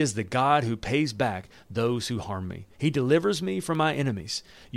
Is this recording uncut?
no; 1 cut; at 2.7 s

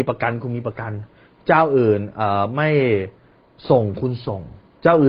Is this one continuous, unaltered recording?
yes; 0 cuts

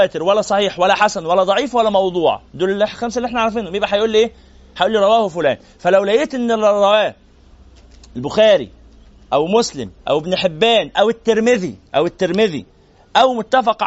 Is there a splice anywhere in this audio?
yes; 2 cuts; at 10.0 s, 11.9 s

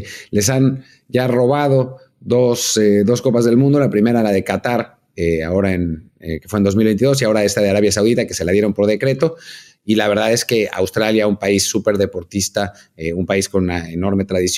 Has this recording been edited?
no; 0 cuts

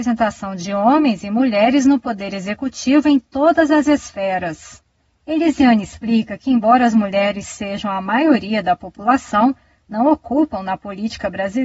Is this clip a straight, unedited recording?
yes; 0 cuts

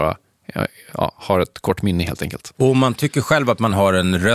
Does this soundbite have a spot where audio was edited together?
no; 0 cuts

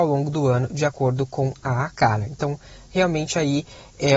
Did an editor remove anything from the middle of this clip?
no; 0 cuts

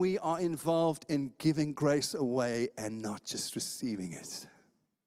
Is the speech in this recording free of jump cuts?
yes; 0 cuts

